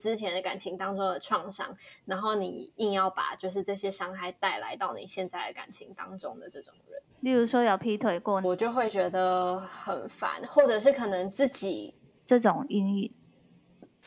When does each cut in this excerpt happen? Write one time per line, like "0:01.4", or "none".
0:07.1
0:08.4
0:12.2

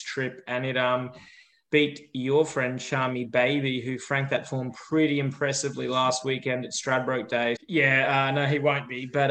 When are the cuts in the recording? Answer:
0:07.6

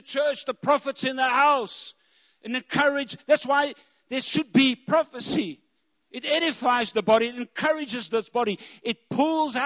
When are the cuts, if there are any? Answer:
none

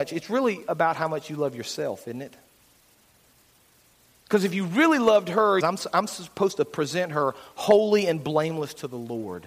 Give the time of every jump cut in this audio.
0:05.6

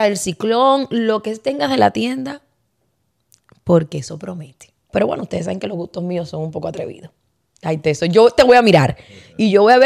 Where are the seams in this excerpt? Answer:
0:04.9

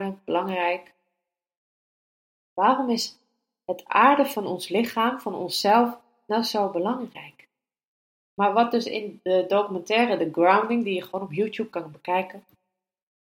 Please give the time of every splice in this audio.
0:02.4
0:08.3

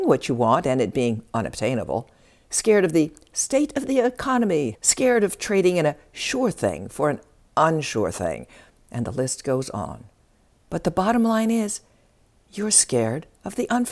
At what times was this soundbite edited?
0:04.7

